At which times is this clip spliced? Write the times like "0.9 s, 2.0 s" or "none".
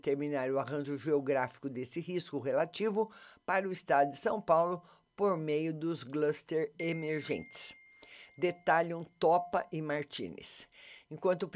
none